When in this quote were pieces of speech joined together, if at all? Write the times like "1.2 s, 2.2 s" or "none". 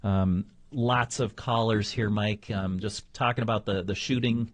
none

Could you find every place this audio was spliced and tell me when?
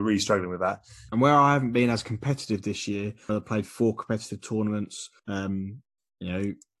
1.1 s, 3.3 s, 5.2 s

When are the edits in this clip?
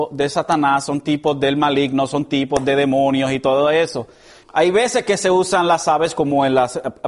4.4 s

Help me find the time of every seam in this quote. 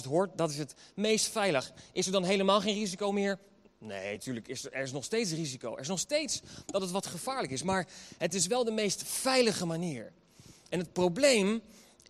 none

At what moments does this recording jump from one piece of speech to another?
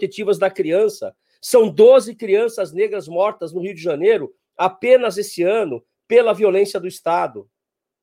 none

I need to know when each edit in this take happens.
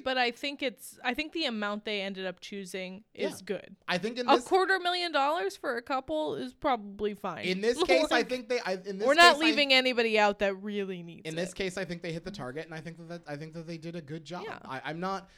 none

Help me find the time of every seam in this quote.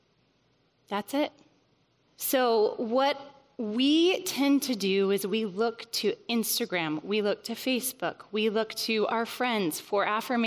2.0 s

